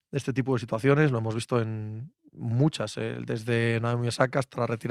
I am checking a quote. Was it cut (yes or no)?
no